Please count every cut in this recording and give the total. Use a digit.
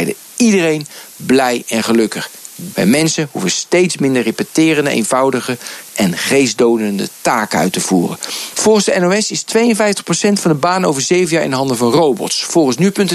2